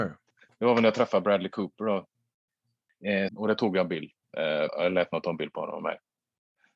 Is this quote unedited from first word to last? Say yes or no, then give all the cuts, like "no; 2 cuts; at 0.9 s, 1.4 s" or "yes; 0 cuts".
no; 2 cuts; at 3.3 s, 4.7 s